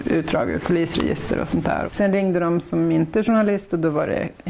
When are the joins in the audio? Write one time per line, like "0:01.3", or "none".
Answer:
0:01.9